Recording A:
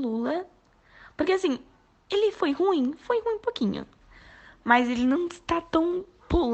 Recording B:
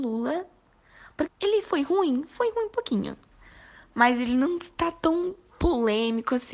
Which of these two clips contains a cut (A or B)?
B